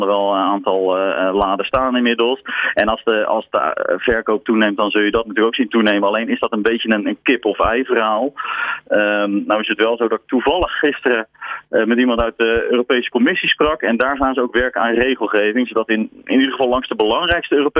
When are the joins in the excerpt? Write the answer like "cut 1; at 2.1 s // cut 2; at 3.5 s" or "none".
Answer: none